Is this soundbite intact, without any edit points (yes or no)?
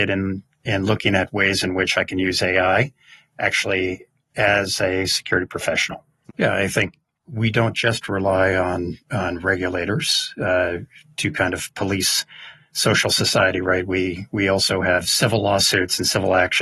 no